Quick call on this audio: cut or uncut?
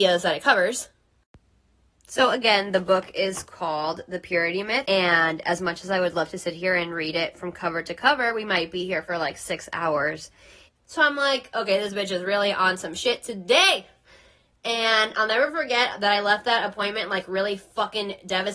cut